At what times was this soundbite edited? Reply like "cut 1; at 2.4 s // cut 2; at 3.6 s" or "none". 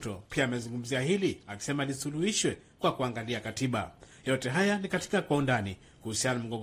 none